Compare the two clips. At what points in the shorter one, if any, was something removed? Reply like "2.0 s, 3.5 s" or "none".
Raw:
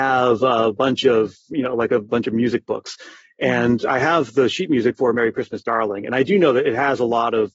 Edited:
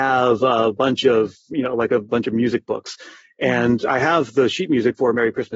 none